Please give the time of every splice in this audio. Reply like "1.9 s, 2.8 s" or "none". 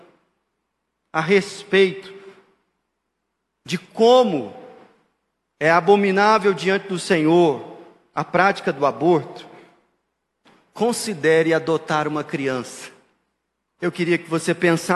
13.8 s